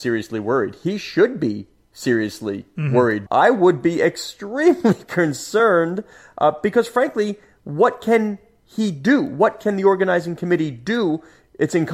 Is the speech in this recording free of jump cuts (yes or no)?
no